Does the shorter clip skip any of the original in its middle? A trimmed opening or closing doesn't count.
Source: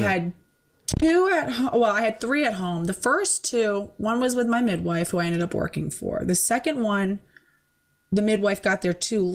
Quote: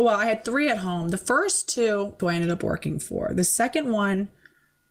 yes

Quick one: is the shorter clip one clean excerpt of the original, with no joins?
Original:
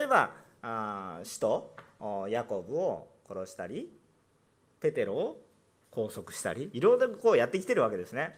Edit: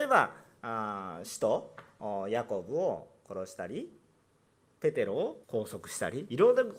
no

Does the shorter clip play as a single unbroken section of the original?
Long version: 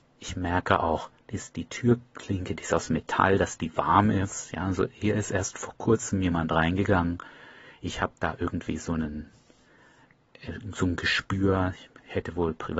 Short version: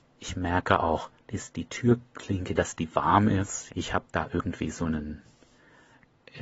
no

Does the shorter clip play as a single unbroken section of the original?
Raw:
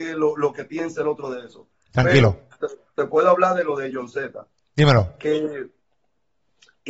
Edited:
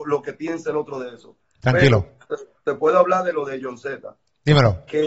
yes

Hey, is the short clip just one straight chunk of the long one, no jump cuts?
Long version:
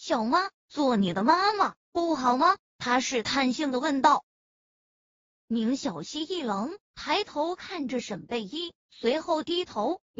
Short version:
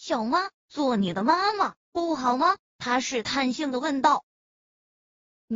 yes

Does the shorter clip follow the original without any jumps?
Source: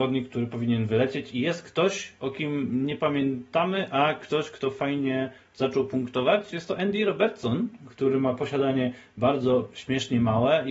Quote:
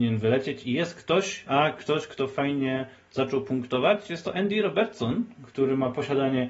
no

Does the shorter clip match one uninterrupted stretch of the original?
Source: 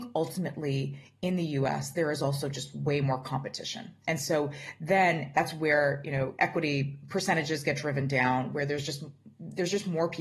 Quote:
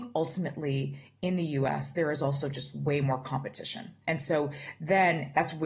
yes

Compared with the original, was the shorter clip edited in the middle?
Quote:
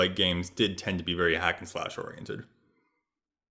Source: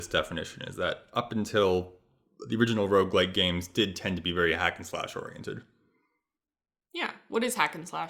no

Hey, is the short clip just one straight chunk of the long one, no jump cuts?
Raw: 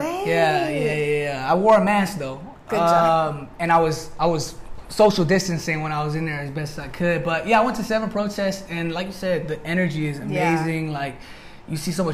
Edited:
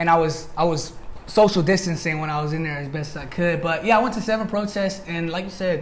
yes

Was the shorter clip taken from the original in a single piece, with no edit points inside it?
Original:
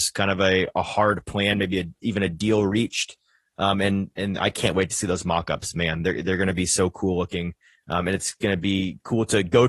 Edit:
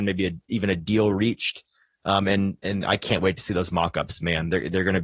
yes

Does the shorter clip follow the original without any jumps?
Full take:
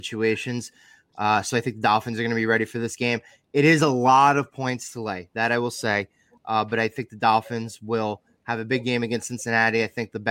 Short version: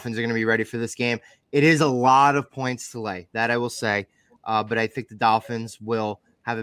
yes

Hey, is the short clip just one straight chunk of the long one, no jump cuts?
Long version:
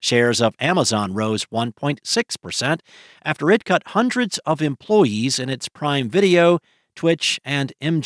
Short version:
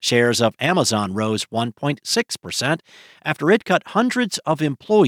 yes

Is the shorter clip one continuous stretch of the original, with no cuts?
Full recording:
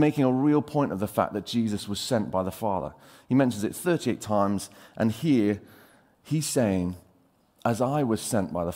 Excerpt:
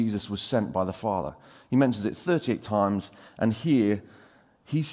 yes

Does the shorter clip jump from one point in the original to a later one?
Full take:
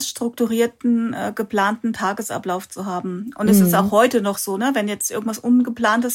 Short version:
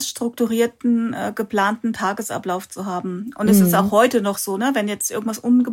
no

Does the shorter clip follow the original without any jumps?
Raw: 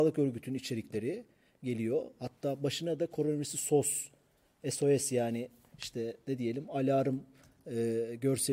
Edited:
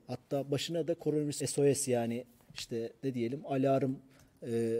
no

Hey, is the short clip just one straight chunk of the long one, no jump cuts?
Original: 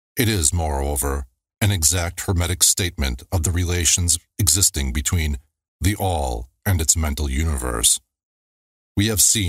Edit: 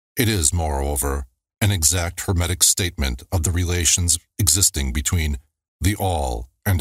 yes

